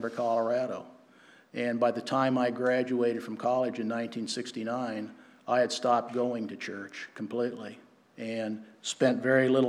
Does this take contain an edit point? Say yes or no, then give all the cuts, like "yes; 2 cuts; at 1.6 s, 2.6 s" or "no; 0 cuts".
no; 0 cuts